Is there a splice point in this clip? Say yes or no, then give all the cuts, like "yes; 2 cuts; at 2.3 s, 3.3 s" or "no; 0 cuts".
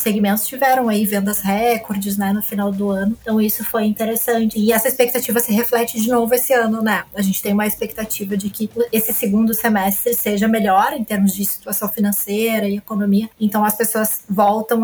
yes; 1 cut; at 4.5 s